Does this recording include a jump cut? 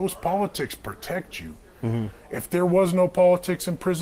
no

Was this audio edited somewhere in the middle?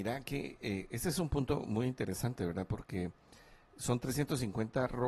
no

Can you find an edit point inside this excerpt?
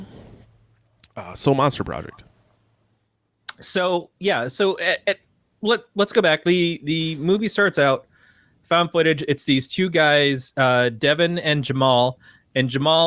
no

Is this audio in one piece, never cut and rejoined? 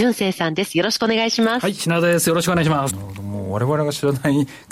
no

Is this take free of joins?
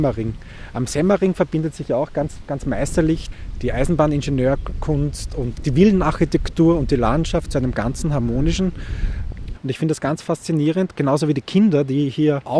no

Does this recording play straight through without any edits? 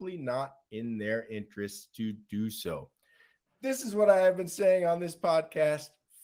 no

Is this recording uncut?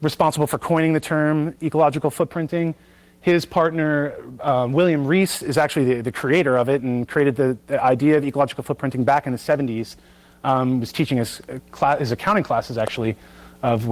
yes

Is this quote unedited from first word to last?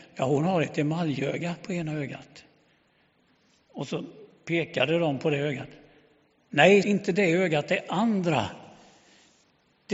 no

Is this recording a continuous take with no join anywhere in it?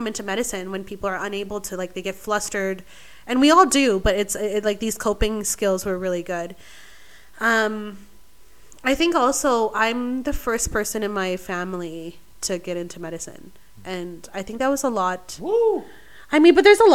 yes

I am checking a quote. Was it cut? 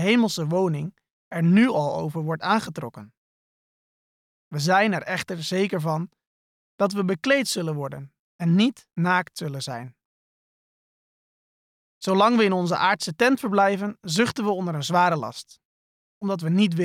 no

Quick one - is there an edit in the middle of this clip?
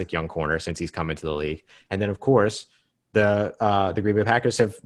no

